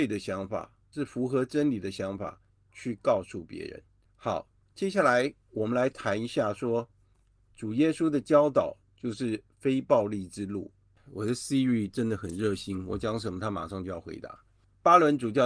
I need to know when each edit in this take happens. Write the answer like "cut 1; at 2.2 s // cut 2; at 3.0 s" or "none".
none